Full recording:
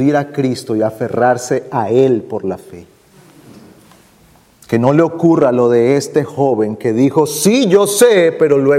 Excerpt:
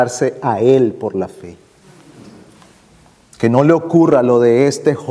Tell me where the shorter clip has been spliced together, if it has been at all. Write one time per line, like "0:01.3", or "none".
none